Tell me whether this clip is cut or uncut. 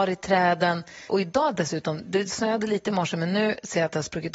cut